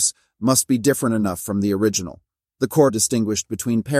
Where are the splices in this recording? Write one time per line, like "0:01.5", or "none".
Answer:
0:02.9